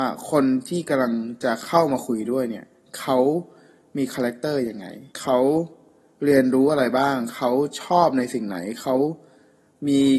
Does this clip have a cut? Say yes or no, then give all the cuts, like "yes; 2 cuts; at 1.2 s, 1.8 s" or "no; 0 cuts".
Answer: yes; 1 cut; at 5.1 s